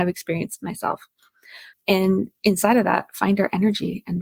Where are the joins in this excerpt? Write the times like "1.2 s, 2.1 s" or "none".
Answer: 1.7 s